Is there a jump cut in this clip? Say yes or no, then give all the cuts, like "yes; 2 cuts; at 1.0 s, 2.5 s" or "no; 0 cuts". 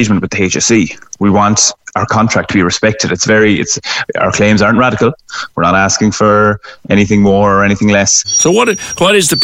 yes; 1 cut; at 8.2 s